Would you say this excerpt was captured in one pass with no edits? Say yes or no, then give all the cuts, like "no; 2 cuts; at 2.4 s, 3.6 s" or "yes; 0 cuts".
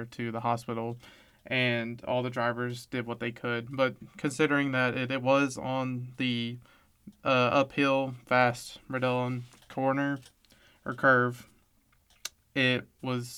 no; 1 cut; at 1.3 s